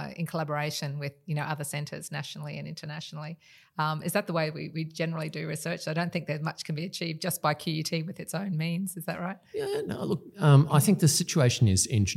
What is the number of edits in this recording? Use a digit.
0